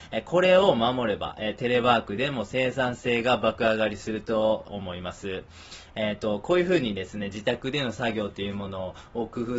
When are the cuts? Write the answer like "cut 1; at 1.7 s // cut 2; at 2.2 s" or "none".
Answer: none